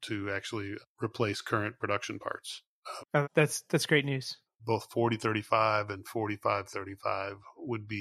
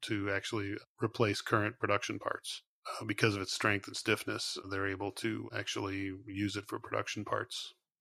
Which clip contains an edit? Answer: first; 2 cuts; at 3.0 s, 4.5 s

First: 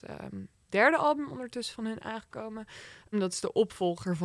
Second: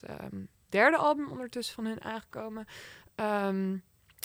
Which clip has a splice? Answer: first; 1 cut; at 3.1 s

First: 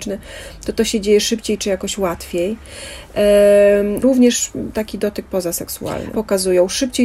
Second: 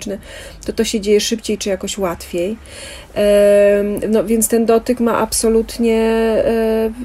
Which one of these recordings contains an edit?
first; 2 cuts; at 4.0 s, 6.1 s

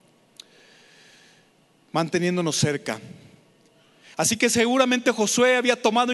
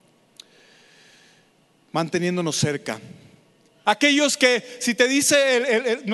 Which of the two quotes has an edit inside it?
second; 1 cut; at 3.8 s

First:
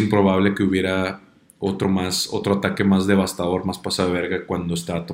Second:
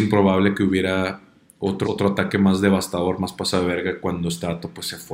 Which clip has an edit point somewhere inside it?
second; 1 cut; at 1.8 s

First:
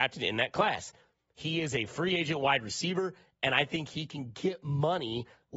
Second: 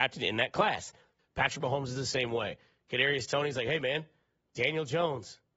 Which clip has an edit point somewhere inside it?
second; 1 cut; at 1.2 s

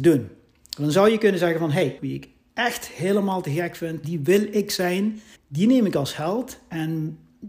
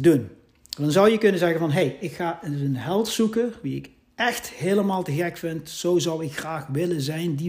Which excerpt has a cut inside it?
first; 3 cuts; at 2.0 s, 4.0 s, 5.3 s

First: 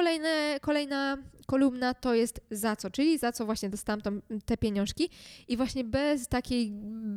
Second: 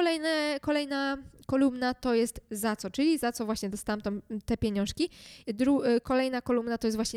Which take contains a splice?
second; 1 cut; at 5.4 s

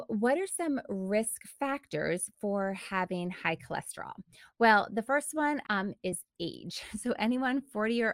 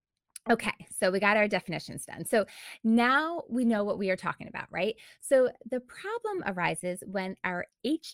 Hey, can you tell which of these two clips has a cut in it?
first; 1 cut; at 5.6 s

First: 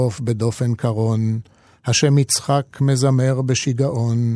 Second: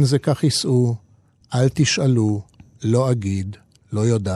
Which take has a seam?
second; 1 cut; at 1.4 s

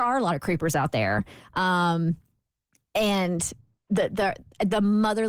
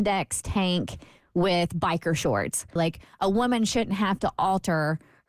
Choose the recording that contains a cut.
second; 1 cut; at 2.8 s

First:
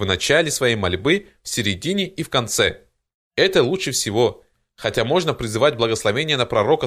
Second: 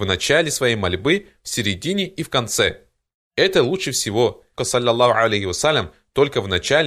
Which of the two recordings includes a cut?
second; 1 cut; at 4.6 s

